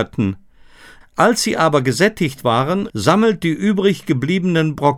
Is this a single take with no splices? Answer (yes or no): no